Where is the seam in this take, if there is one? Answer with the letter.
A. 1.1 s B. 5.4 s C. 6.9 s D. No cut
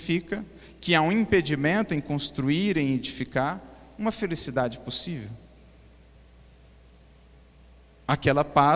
D